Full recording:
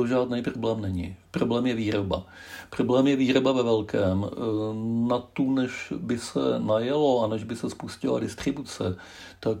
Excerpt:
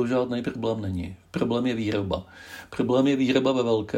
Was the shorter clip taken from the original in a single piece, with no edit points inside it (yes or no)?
yes